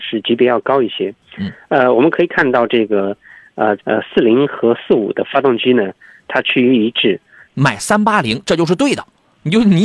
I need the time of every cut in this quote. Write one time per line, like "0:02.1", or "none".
0:03.8
0:07.4